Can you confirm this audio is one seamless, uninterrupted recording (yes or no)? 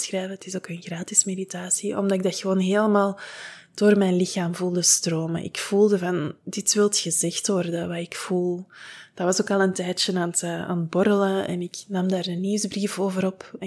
yes